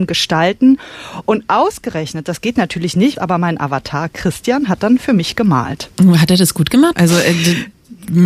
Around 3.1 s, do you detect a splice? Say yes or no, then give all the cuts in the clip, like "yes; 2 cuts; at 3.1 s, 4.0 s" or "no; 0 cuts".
yes; 2 cuts; at 3.1 s, 6.9 s